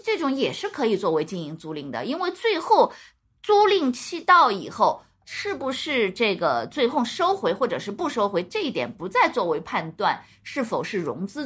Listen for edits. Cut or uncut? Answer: uncut